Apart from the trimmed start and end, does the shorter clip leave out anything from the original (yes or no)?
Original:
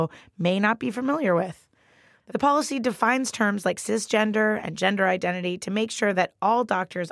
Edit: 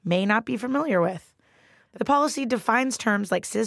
no